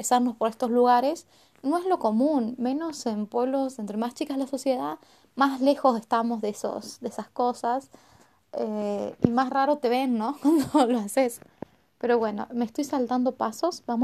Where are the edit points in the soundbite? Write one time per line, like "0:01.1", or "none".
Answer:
none